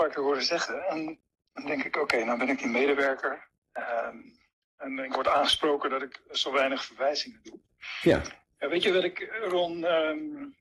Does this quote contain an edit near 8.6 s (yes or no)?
yes